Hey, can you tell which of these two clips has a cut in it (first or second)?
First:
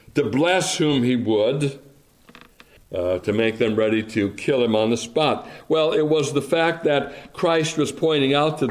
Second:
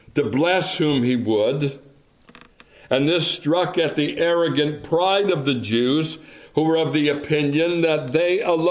first